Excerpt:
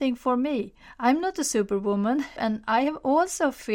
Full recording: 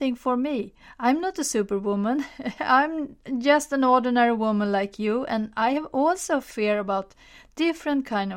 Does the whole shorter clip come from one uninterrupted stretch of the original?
no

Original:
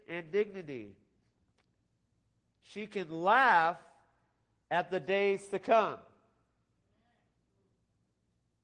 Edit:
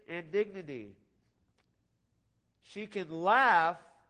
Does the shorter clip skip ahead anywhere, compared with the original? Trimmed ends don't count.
no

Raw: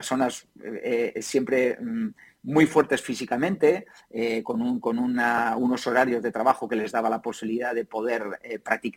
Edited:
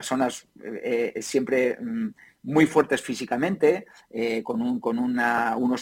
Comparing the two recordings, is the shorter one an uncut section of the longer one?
yes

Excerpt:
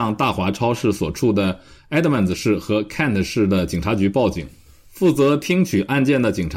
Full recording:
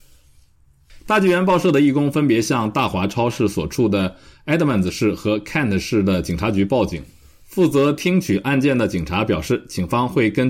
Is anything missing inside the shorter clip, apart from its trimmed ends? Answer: no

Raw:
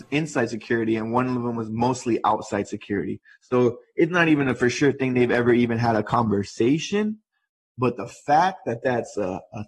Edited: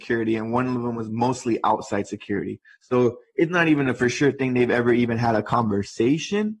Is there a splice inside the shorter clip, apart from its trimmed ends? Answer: no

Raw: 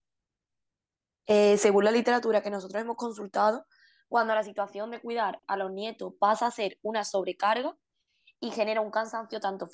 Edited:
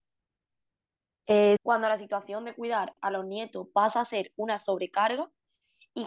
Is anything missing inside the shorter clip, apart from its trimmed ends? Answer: yes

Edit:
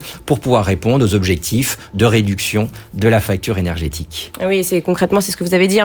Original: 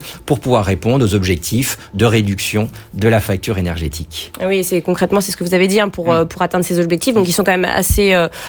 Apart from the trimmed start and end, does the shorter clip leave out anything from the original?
no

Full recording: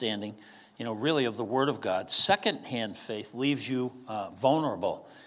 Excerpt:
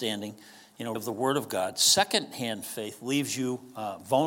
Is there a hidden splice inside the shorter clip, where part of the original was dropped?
yes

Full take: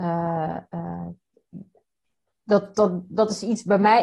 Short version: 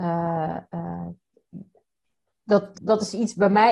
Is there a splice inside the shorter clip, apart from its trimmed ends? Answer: yes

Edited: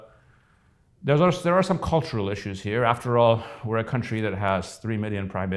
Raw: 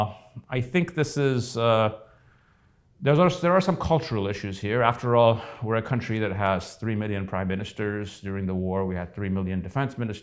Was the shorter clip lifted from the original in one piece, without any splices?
yes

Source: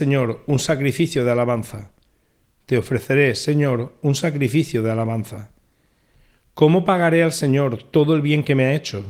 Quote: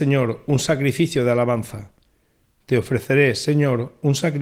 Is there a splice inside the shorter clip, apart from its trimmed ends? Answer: no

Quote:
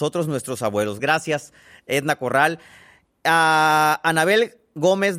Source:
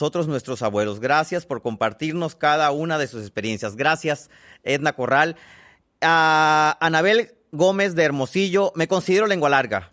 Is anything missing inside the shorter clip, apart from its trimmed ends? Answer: yes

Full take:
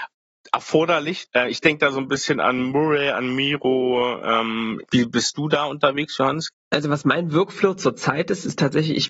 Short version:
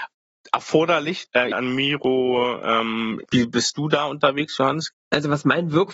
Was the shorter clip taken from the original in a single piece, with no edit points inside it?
no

